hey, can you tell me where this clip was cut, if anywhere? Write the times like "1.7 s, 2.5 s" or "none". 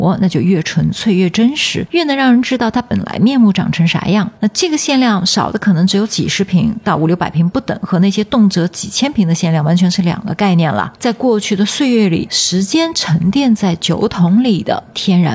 4.4 s, 11.0 s